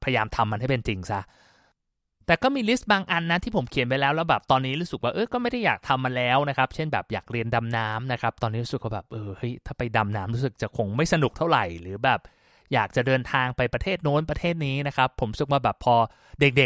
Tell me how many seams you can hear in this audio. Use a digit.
0